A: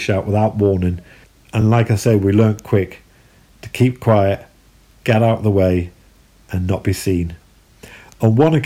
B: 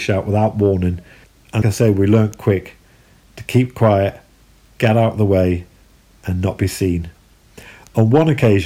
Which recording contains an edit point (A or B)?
B